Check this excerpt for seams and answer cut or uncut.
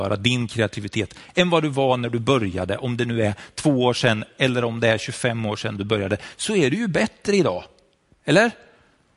uncut